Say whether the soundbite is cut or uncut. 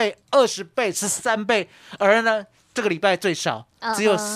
uncut